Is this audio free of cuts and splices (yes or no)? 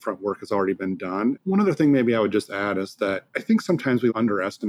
no